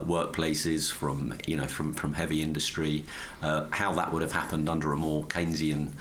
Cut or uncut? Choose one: uncut